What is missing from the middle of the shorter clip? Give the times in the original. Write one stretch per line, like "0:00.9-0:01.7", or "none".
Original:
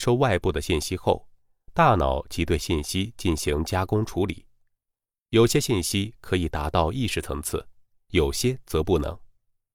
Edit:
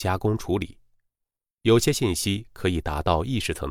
none